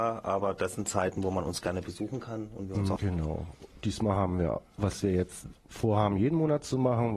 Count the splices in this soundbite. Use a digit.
2